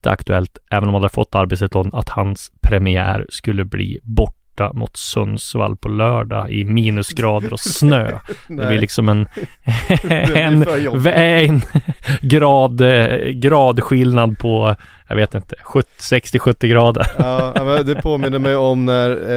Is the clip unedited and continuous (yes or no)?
yes